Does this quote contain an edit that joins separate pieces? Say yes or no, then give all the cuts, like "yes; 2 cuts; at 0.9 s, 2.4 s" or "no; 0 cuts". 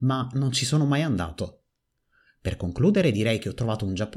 no; 0 cuts